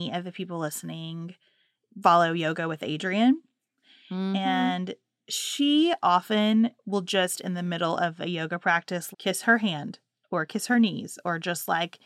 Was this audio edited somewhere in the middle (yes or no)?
yes